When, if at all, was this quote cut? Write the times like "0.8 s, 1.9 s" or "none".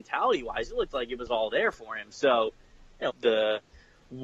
3.1 s